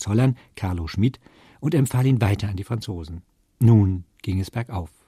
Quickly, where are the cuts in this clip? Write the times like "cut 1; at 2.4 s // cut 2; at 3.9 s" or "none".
none